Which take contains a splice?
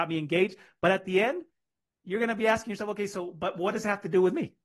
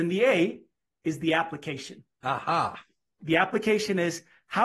second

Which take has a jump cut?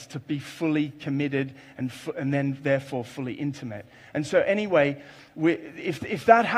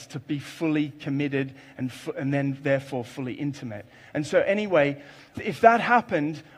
second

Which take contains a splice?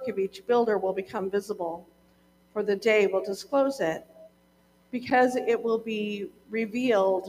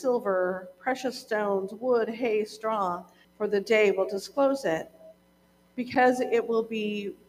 second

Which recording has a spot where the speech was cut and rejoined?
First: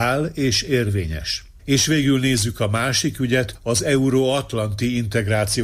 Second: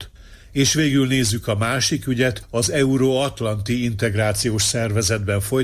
first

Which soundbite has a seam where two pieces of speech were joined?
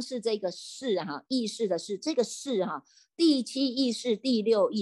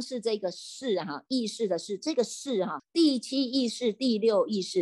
second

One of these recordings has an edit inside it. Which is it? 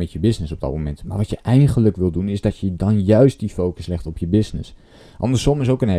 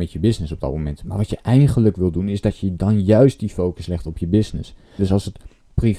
second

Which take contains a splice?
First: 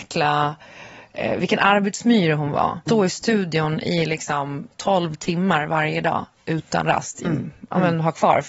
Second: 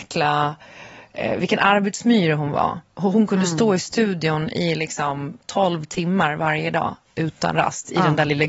first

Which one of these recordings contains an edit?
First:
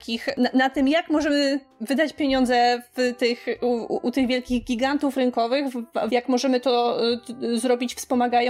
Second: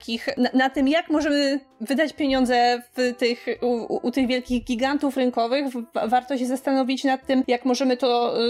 first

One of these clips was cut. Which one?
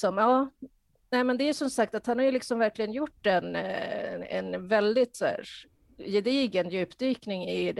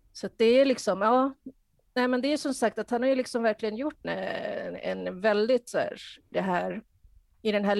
second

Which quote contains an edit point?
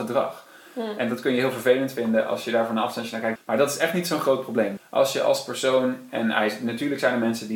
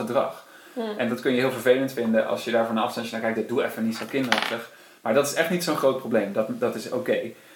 first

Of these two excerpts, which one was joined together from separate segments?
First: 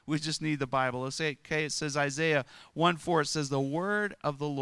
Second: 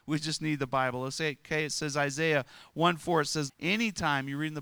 second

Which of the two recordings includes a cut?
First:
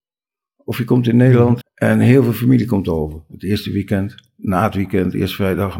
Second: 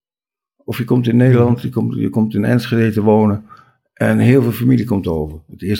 first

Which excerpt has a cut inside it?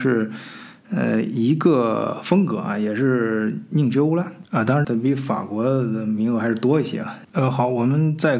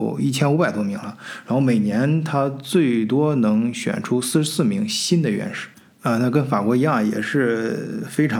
first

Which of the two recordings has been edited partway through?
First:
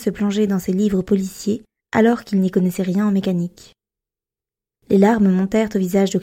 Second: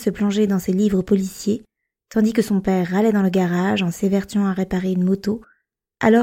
first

